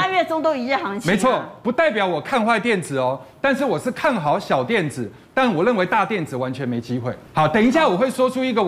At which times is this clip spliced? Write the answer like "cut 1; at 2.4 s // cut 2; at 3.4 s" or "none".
cut 1; at 7.3 s